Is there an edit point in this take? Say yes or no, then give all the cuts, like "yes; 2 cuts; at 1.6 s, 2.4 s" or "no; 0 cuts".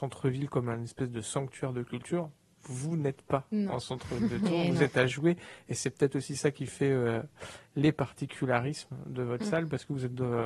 no; 0 cuts